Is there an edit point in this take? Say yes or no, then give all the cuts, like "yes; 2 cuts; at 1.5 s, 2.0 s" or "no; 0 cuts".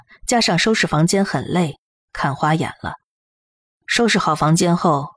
yes; 1 cut; at 3.7 s